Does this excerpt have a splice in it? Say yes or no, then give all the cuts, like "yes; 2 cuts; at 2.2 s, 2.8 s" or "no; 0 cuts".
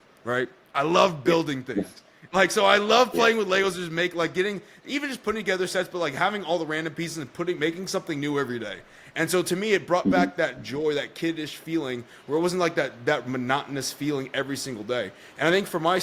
no; 0 cuts